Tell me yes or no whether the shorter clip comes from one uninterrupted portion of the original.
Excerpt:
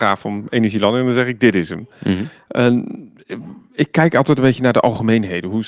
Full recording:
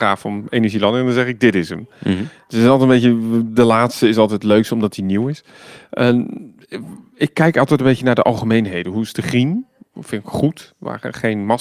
no